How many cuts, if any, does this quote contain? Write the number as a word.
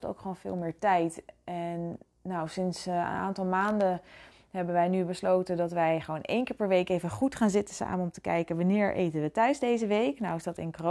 zero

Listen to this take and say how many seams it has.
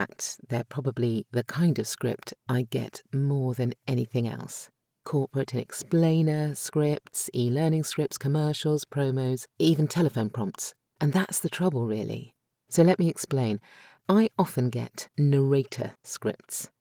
three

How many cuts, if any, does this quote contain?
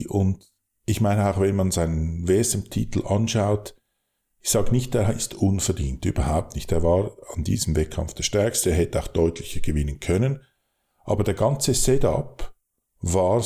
zero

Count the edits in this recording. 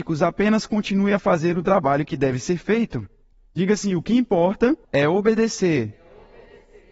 one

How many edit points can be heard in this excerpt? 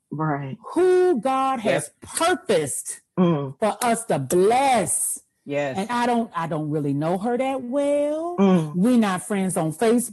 one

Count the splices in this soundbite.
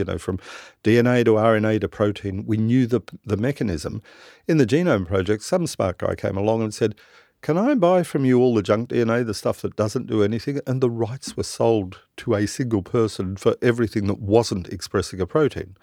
zero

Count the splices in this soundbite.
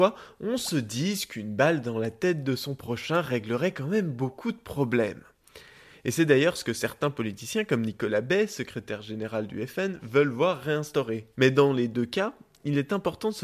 one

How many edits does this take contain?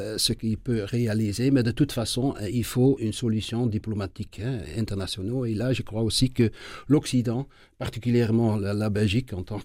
one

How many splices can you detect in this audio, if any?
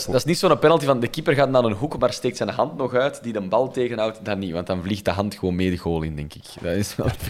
zero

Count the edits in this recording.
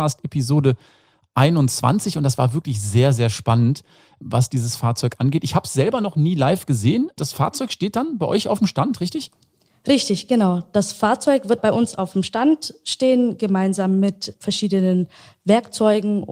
zero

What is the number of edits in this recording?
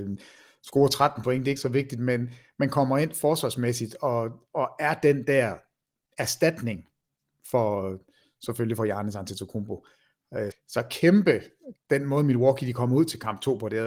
two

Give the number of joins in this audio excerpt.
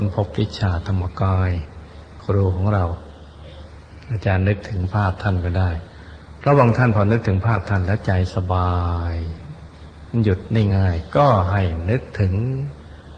one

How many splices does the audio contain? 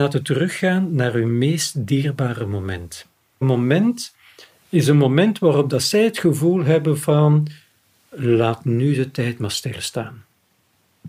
one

